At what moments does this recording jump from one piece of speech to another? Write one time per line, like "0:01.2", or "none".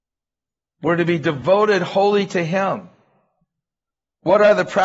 none